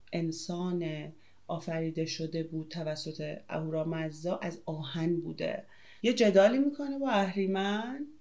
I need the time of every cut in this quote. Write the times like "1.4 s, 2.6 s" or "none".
6.0 s